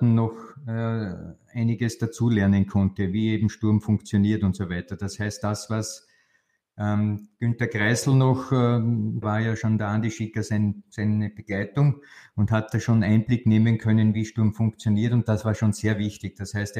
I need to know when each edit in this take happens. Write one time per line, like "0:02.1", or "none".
0:09.2